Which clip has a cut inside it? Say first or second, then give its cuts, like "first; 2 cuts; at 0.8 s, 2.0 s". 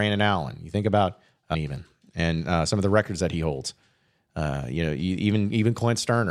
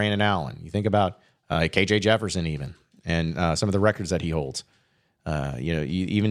first; 1 cut; at 1.5 s